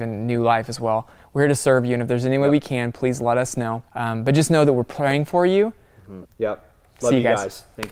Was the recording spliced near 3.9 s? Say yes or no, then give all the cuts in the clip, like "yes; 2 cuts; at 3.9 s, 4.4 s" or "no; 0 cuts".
yes; 2 cuts; at 3.9 s, 6.2 s